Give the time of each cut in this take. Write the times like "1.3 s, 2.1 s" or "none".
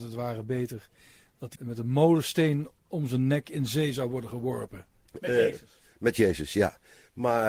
1.6 s, 5.1 s